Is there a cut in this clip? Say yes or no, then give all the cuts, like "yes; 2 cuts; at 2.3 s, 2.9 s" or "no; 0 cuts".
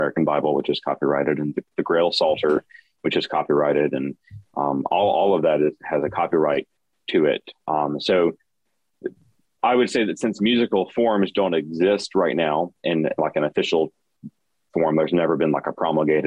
no; 0 cuts